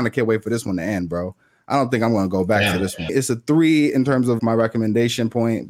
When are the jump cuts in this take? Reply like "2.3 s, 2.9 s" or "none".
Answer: 3.1 s, 4.4 s